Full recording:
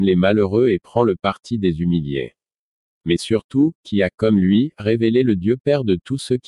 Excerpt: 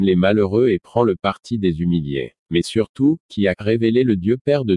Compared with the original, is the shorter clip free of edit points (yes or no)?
no